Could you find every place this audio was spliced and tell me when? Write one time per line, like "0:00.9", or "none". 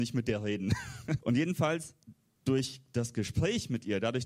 0:01.2